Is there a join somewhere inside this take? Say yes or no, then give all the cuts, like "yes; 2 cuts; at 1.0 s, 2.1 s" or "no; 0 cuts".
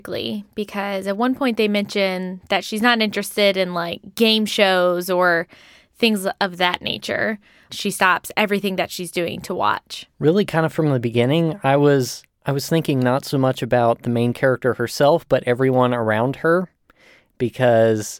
yes; 2 cuts; at 7.7 s, 10.1 s